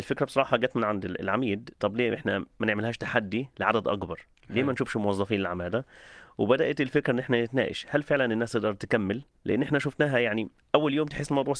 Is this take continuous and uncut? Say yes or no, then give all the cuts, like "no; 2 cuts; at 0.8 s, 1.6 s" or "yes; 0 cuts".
yes; 0 cuts